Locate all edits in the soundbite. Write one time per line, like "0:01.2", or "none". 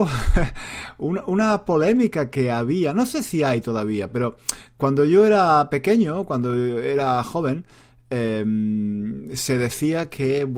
none